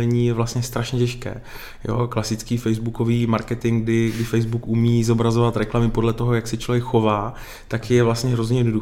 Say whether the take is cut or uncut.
uncut